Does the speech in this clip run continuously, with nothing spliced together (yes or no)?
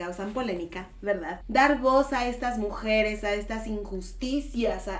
no